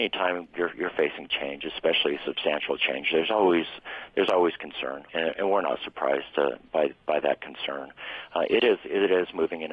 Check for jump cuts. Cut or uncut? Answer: cut